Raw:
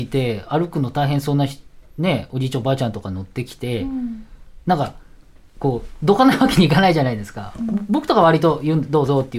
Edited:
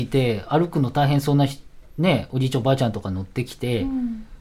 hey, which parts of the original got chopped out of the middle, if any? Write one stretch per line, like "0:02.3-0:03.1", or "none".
none